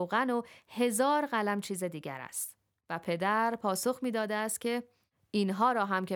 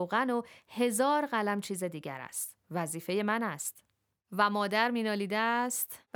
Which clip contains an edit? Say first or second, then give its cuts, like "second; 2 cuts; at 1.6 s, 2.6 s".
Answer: second; 1 cut; at 2.6 s